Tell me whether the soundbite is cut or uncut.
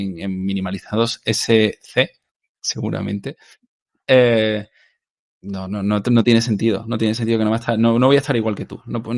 uncut